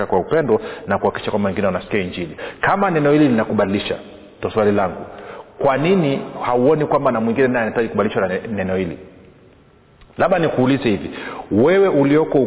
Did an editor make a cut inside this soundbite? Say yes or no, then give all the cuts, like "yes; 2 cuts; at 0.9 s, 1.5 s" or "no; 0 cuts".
no; 0 cuts